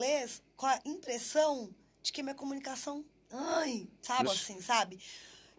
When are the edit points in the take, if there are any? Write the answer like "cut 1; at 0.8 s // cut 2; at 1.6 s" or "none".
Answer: cut 1; at 4.2 s